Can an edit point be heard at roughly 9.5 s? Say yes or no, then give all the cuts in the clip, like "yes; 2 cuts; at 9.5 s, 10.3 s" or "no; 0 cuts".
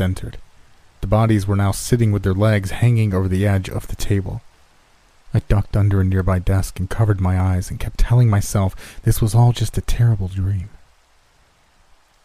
no; 1 cut; at 1.0 s